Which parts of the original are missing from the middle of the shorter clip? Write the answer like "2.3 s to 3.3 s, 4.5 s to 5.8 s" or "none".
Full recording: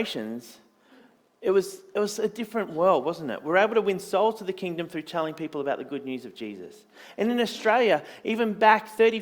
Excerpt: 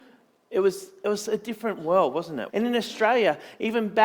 3.4 s to 7.1 s